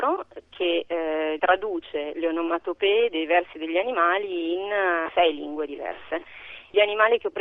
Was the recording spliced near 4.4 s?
no; 1 cut; at 1.4 s

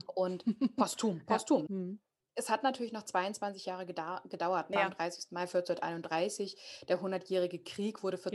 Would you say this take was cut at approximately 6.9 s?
no; 2 cuts; at 1.7 s, 4.7 s

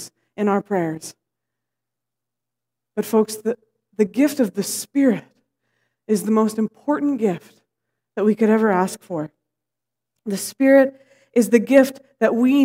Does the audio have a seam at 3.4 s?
no; 0 cuts

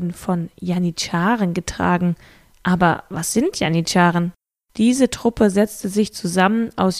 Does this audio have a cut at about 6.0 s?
no; 2 cuts; at 2.5 s, 4.6 s

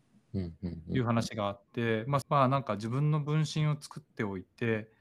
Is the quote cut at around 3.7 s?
no; 1 cut; at 2.2 s

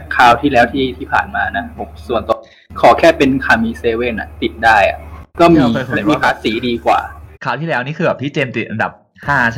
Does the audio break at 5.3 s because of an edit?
yes; 2 cuts; at 5.3 s, 7.3 s

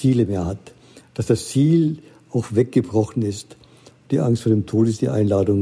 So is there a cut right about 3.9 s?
yes; 1 cut; at 3.9 s

